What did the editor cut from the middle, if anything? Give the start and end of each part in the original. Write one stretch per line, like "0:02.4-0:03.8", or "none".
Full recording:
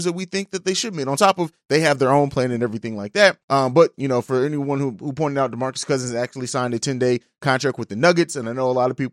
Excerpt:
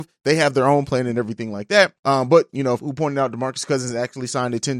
0:04.2-0:05.0